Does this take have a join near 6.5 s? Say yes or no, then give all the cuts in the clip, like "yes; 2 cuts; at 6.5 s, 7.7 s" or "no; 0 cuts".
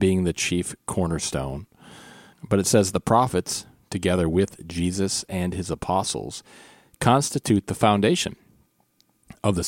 no; 1 cut; at 2.3 s